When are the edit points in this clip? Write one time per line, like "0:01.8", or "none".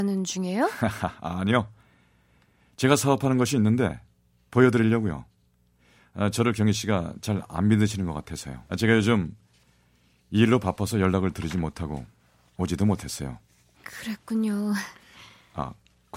0:08.7
0:13.7